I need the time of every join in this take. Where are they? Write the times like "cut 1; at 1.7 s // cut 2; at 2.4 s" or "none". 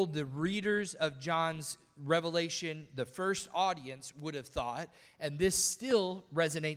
none

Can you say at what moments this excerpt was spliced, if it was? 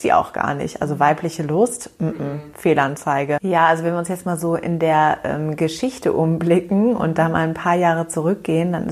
cut 1; at 3.4 s

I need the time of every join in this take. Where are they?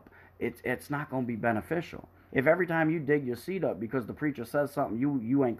cut 1; at 2.3 s

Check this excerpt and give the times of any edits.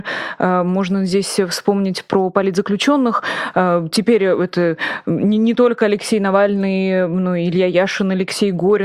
none

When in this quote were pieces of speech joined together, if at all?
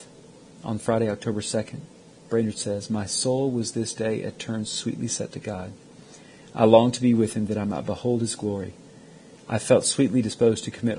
none

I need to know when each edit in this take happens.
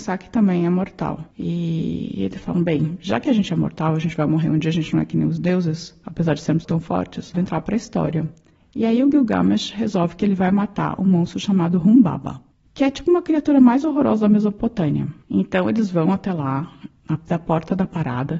cut 1; at 7.3 s // cut 2; at 15.2 s

